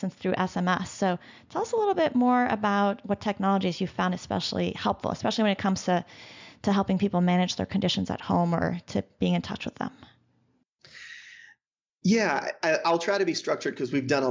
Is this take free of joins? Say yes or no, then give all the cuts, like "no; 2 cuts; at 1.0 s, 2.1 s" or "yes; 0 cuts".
yes; 0 cuts